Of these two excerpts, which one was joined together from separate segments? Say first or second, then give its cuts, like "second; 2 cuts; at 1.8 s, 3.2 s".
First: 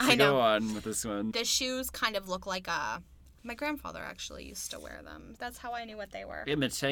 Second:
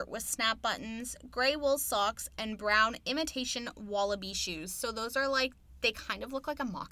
first; 3 cuts; at 1.3 s, 3.3 s, 5.4 s